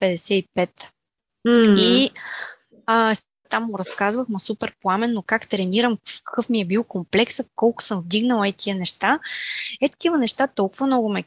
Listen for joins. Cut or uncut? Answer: cut